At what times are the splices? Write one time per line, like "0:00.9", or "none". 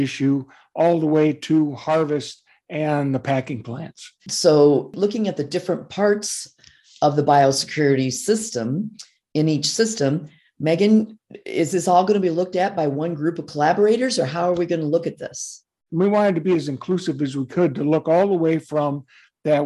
0:04.2
0:15.9